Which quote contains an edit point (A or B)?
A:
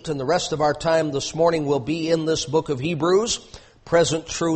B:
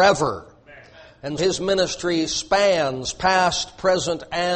B